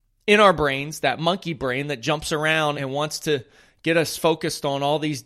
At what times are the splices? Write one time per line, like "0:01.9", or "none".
0:02.7